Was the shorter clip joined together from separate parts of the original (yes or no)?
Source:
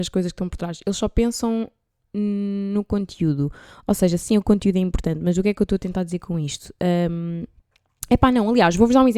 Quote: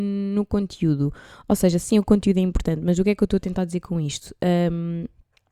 no